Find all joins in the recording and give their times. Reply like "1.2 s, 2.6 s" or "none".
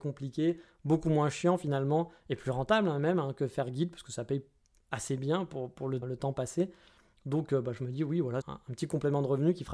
6.0 s, 8.4 s